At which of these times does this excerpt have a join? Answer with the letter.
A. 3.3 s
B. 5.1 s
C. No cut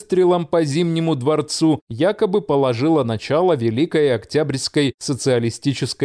C